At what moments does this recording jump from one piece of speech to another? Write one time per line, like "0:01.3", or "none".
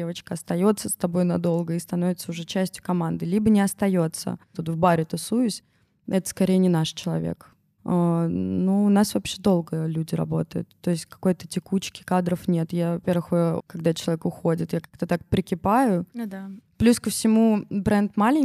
0:04.5
0:07.8
0:13.6